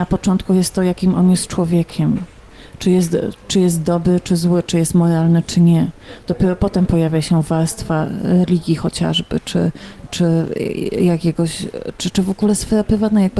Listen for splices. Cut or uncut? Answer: cut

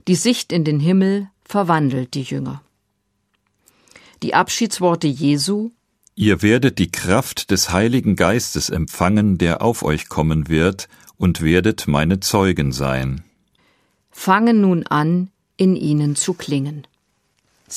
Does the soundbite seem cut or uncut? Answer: uncut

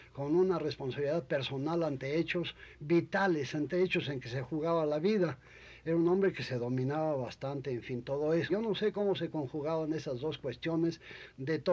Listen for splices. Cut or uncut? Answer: cut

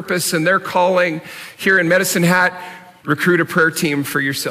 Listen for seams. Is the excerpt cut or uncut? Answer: cut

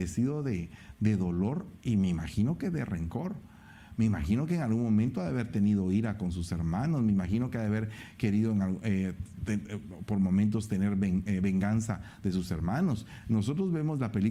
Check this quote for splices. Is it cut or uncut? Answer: uncut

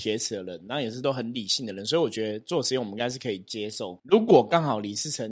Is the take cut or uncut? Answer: cut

